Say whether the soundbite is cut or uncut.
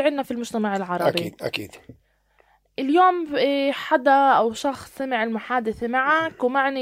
uncut